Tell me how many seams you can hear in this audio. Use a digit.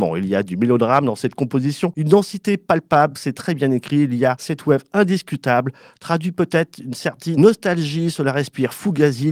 0